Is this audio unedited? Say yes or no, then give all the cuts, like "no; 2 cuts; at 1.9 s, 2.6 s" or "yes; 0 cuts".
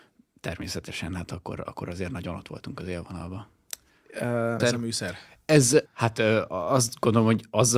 no; 2 cuts; at 4.6 s, 5.9 s